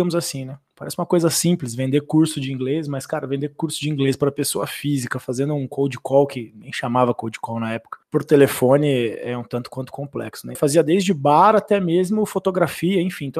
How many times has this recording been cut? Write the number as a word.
two